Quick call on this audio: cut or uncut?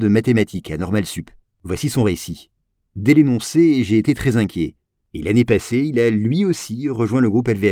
cut